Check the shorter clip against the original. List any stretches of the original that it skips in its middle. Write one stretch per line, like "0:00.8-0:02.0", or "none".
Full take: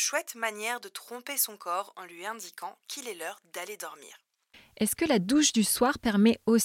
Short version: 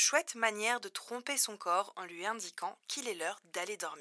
none